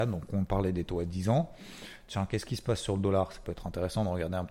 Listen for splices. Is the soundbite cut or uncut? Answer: uncut